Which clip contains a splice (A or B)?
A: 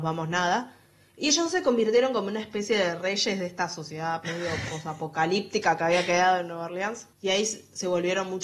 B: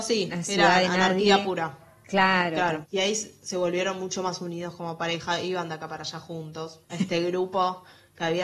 B